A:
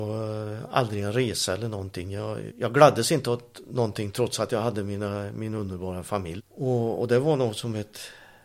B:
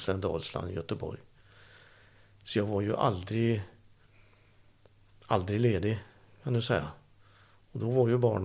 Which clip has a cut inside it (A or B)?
A